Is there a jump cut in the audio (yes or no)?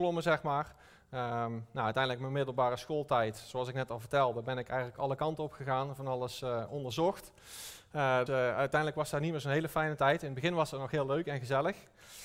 yes